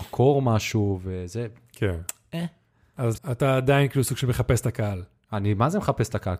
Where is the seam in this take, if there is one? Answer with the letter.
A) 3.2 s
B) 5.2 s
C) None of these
A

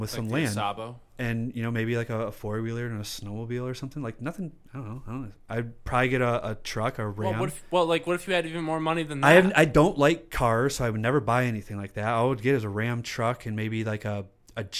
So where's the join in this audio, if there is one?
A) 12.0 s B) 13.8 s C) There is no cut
C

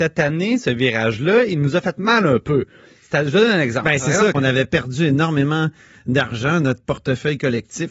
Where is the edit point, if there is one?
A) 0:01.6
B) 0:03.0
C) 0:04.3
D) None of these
C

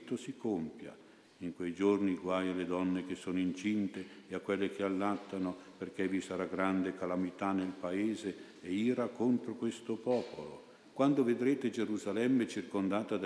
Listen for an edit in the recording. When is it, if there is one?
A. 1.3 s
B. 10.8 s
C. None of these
B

